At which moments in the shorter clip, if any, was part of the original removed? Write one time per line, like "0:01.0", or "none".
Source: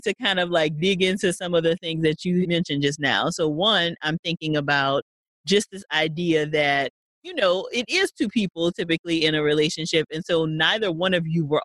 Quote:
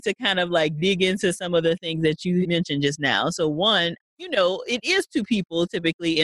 0:04.0